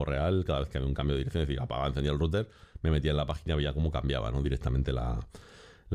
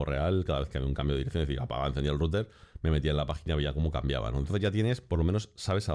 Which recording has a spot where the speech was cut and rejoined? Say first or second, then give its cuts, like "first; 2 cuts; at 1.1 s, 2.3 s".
second; 1 cut; at 4.4 s